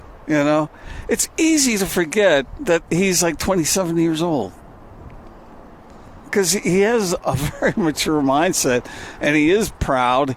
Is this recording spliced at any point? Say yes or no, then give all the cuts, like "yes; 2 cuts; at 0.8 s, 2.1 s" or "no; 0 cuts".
yes; 1 cut; at 7.2 s